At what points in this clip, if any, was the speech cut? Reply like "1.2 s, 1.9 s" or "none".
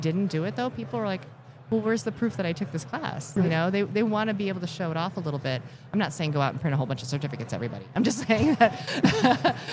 none